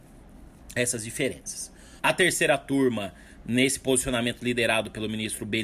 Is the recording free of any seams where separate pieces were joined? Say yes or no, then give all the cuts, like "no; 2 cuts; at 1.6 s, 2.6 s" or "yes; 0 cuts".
no; 1 cut; at 2.0 s